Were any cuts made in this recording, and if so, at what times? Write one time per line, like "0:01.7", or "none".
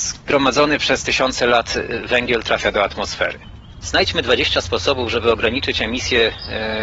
0:03.8